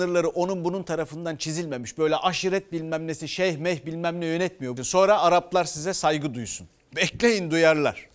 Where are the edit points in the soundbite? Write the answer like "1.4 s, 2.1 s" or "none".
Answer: 4.8 s